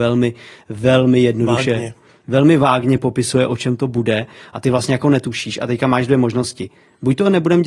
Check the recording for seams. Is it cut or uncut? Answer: uncut